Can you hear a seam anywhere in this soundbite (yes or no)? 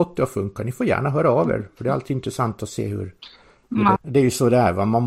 yes